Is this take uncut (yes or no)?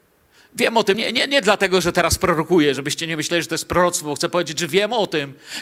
yes